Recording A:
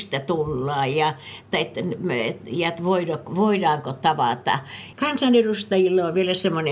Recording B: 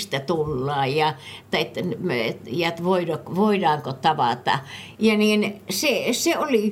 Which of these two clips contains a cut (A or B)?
A